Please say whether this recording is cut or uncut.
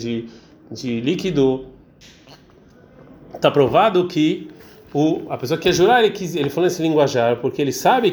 uncut